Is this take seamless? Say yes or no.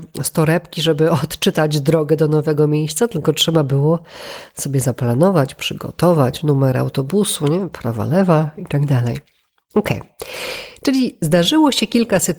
yes